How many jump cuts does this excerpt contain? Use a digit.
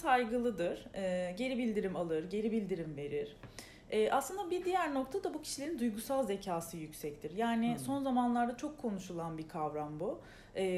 0